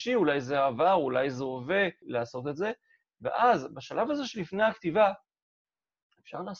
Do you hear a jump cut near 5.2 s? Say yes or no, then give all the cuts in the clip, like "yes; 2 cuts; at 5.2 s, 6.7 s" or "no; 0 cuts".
no; 1 cut; at 2.0 s